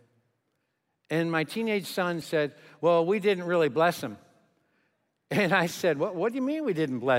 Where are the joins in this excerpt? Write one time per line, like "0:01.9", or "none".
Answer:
0:02.2